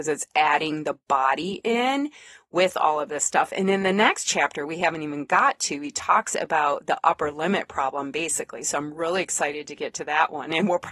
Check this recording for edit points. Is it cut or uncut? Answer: uncut